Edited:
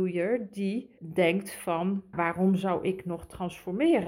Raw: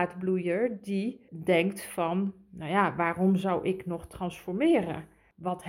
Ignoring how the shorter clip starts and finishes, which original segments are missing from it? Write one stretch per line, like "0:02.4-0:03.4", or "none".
0:02.4-0:02.9